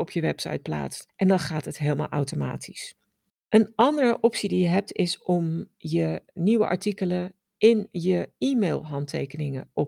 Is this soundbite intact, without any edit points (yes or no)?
yes